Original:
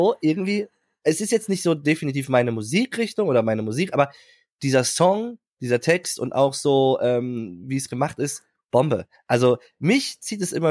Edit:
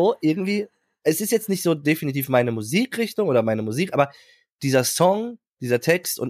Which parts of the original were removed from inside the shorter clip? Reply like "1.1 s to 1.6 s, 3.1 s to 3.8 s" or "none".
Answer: none

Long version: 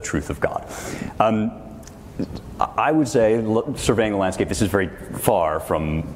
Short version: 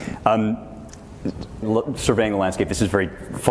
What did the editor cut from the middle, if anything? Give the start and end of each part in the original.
2.6 s to 3.4 s

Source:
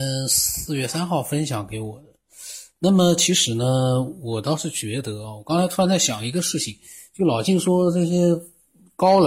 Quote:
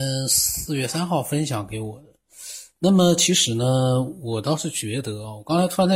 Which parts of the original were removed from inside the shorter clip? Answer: none

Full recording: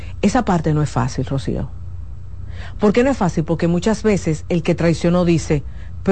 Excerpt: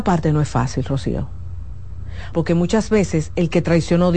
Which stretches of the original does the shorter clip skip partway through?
2.7 s to 3.5 s

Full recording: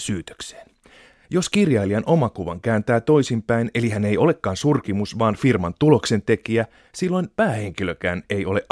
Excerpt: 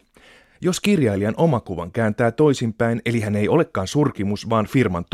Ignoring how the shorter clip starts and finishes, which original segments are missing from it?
none

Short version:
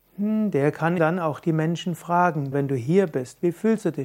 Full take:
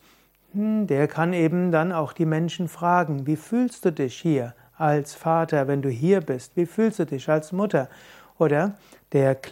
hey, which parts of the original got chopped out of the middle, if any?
1.3 s to 1.7 s, 3.2 s to 5.7 s

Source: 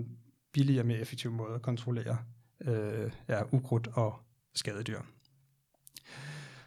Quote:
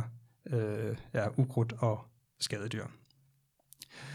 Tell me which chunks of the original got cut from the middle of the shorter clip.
none

